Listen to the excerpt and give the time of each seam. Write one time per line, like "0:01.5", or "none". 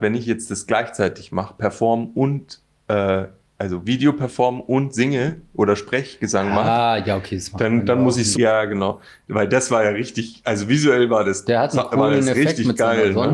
0:08.3